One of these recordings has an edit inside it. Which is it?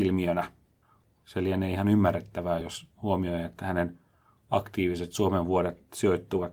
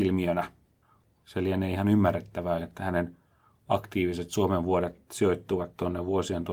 second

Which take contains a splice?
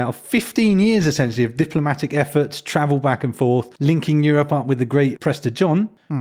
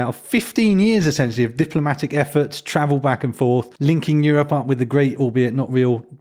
first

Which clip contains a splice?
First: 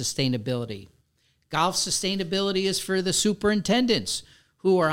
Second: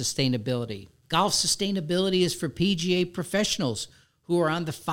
second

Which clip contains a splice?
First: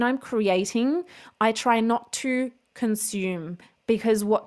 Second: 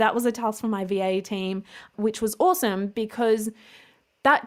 second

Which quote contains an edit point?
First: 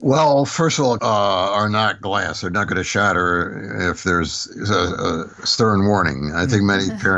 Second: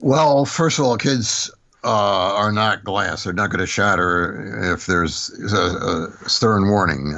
first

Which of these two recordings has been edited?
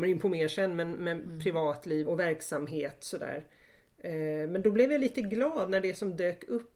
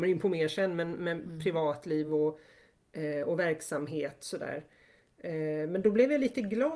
first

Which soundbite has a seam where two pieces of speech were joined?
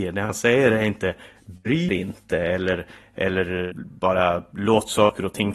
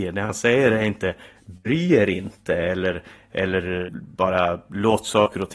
first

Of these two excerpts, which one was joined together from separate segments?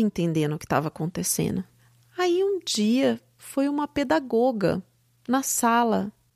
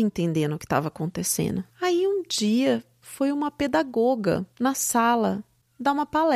second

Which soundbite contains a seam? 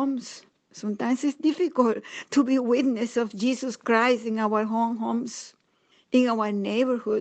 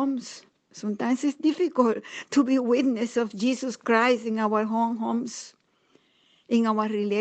first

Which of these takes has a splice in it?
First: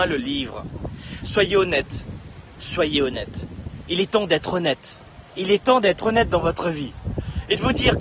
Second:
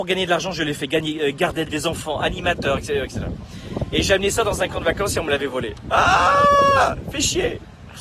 second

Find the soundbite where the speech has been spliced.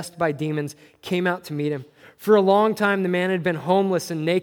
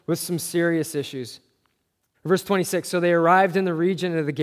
second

